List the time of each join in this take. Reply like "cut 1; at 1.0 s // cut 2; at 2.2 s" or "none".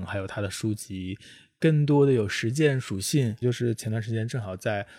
cut 1; at 3.4 s